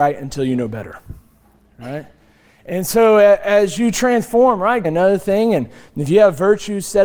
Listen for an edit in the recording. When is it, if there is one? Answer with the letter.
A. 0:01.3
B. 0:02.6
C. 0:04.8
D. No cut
C